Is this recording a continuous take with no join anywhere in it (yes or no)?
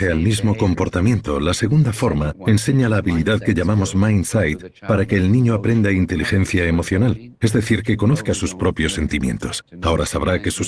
yes